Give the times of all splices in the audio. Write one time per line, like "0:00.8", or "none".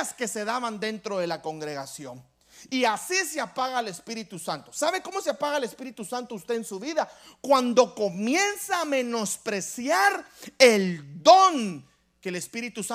none